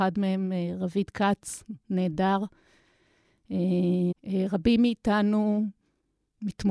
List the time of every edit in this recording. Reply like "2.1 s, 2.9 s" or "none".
4.1 s

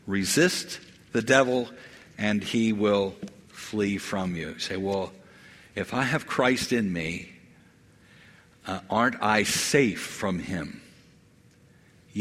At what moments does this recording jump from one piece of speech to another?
none

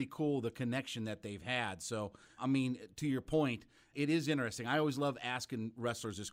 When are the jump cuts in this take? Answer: 2.4 s, 3.9 s

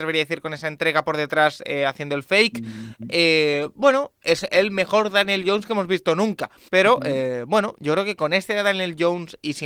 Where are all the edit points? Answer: 6.7 s

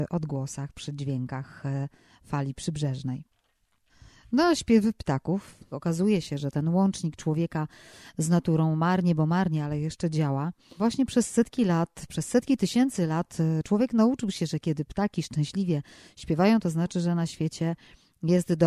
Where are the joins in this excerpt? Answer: none

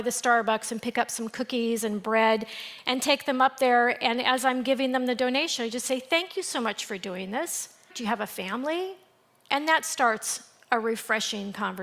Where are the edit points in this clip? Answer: 7.9 s

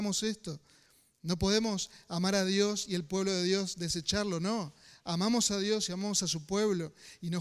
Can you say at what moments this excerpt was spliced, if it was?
none

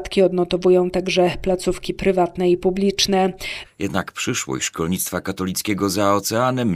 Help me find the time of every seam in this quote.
3.6 s

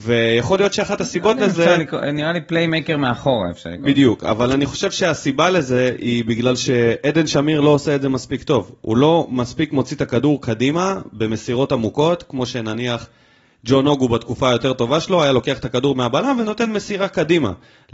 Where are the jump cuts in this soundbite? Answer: none

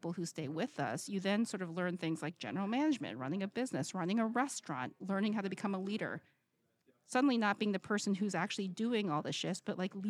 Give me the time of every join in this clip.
5.0 s

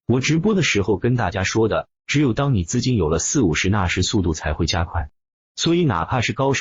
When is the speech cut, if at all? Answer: 1.9 s

